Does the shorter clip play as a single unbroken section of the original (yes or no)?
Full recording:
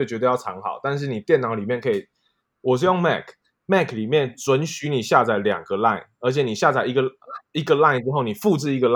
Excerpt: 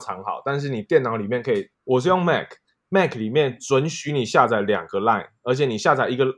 no